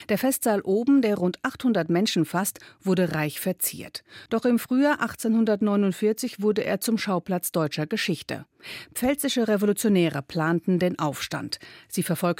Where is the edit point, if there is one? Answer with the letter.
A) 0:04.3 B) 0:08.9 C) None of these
A